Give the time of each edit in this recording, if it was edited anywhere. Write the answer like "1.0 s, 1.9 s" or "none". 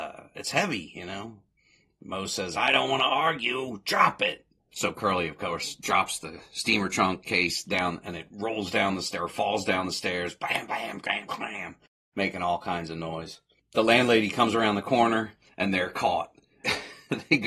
none